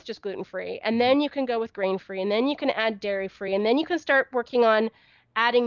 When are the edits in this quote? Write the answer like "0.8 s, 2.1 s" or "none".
3.5 s